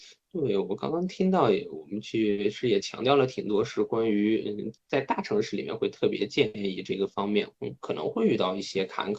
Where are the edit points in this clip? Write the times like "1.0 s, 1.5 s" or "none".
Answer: 7.5 s